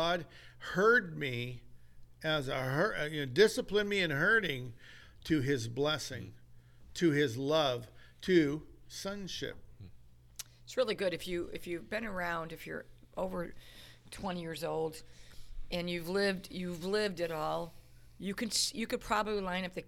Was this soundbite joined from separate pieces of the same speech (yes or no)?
no